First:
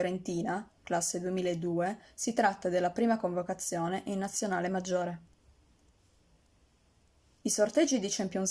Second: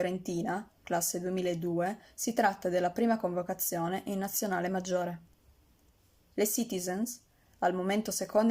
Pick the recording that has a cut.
second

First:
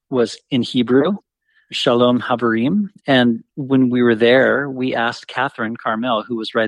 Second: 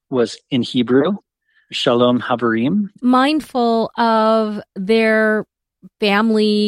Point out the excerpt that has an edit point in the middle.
second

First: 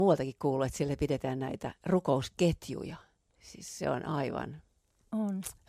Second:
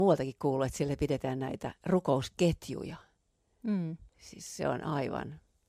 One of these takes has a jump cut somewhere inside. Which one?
first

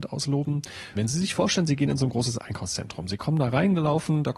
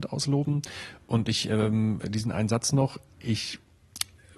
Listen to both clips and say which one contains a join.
first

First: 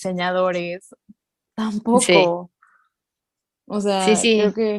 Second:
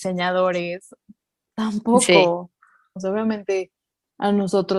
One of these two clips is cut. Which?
second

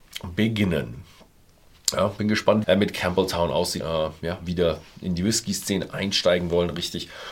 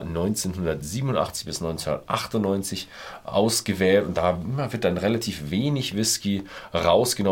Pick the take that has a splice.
first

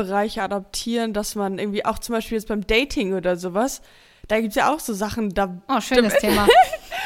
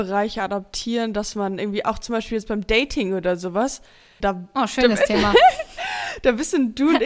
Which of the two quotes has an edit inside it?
second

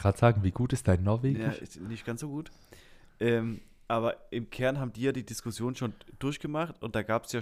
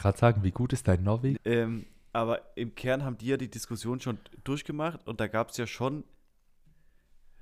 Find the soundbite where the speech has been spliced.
second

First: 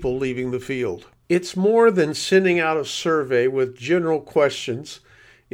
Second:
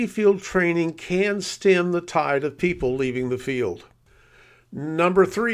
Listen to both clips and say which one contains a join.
first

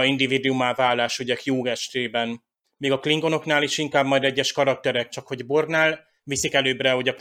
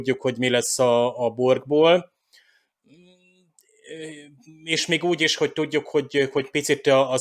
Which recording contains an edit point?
first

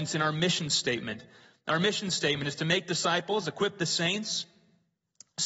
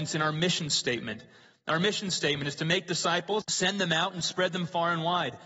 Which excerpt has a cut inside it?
second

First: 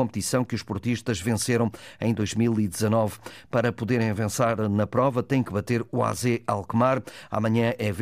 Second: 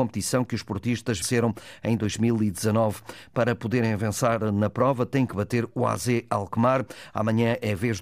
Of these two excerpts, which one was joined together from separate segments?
second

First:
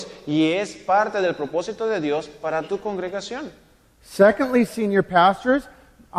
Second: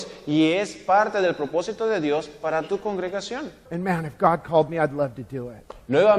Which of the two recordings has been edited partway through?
second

